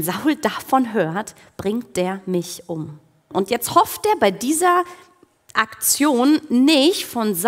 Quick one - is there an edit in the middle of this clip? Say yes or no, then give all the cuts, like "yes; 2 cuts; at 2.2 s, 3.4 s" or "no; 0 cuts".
yes; 1 cut; at 3.3 s